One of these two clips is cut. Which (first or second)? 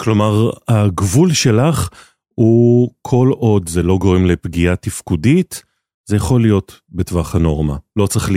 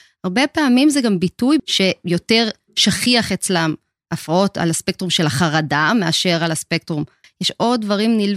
second